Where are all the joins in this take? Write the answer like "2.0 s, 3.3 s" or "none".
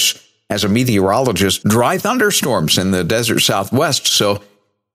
1.6 s